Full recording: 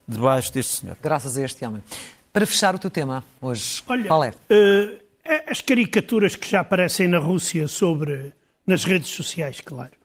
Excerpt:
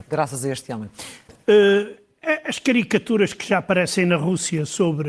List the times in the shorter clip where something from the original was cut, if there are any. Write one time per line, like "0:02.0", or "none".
0:01.3

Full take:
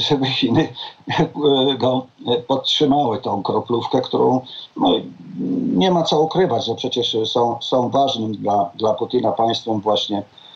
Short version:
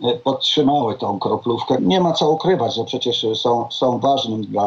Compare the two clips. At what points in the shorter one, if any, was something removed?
0:01.8

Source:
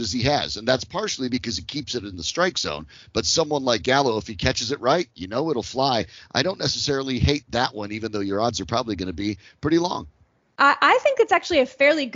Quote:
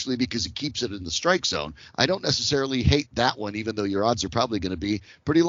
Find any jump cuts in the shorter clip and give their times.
0:01.8

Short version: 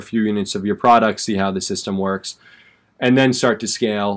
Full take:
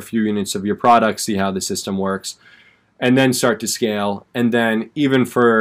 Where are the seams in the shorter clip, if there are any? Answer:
none

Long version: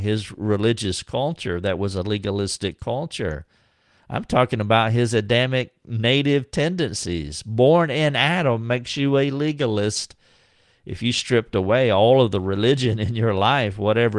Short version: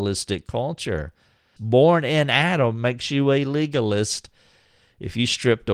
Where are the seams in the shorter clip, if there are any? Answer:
0:01.6

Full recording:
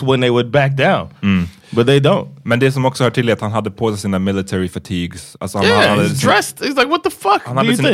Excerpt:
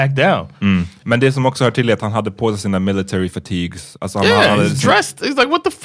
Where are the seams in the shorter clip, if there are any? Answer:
0:01.0

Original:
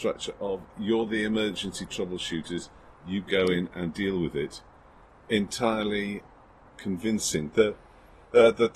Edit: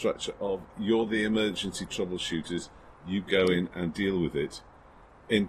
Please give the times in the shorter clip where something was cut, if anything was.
none

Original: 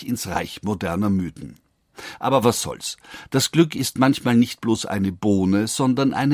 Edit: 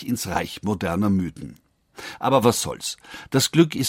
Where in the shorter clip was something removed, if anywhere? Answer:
none

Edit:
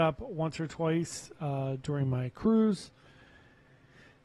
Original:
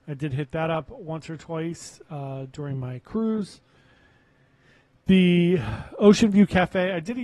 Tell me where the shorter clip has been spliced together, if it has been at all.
none

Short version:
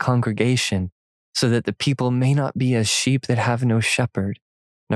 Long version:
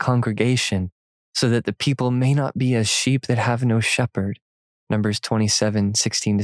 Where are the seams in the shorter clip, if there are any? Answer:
none

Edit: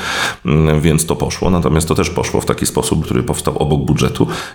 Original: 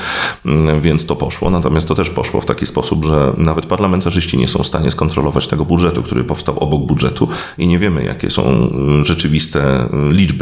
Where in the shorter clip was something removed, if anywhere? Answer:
0:03.0

